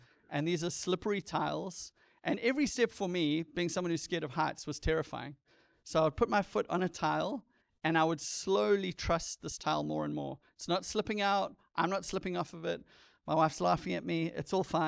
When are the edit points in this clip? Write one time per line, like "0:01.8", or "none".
none